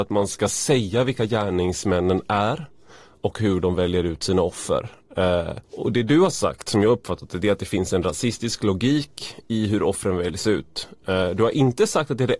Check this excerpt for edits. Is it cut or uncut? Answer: cut